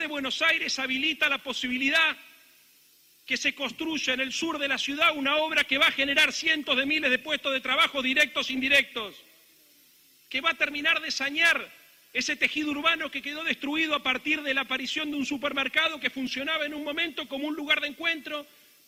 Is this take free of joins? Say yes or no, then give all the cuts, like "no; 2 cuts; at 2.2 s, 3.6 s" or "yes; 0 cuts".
yes; 0 cuts